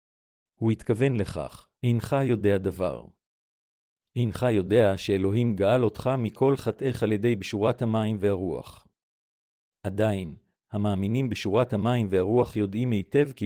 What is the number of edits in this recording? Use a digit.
1